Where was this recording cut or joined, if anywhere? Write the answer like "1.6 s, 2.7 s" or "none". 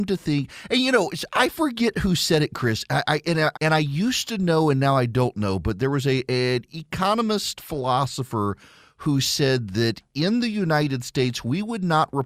3.5 s